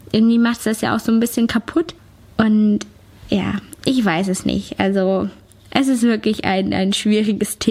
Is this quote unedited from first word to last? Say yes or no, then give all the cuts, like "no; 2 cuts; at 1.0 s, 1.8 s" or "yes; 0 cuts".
yes; 0 cuts